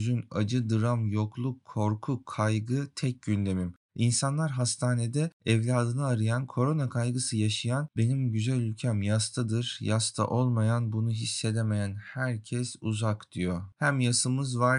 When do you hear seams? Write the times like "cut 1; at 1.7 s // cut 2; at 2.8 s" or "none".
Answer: cut 1; at 13.7 s

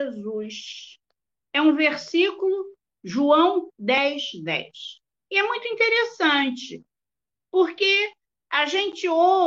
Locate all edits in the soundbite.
none

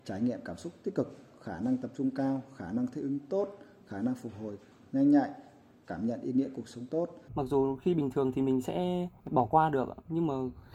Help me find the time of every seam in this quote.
cut 1; at 7.3 s

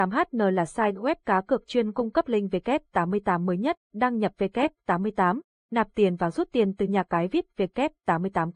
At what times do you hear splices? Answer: cut 1; at 3.8 s

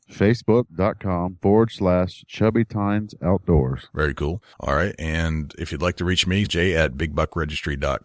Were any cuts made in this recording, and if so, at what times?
cut 1; at 4.5 s // cut 2; at 6.4 s

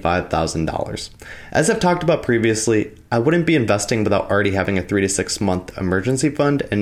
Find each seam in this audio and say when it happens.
none

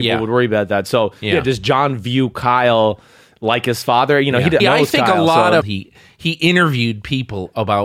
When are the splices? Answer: cut 1; at 4.6 s // cut 2; at 5.6 s

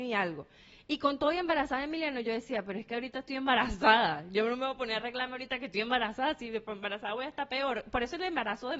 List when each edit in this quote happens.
none

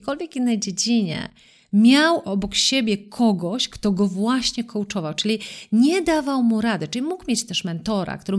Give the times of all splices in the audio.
cut 1; at 2.2 s

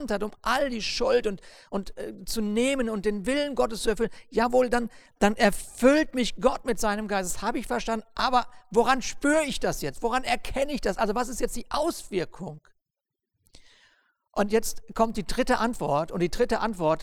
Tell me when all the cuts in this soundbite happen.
none

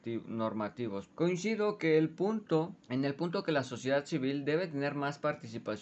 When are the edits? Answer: cut 1; at 1.1 s // cut 2; at 2.8 s

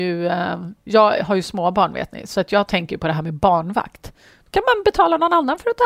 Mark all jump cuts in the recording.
none

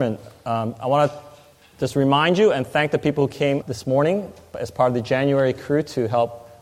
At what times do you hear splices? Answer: cut 1; at 3.6 s

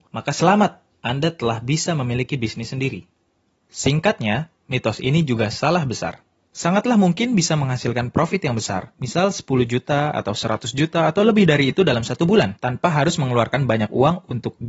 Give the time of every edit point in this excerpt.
cut 1; at 3.6 s

